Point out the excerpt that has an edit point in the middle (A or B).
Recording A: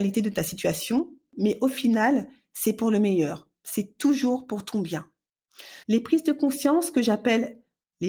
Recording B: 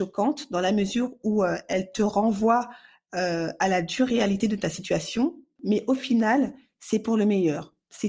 A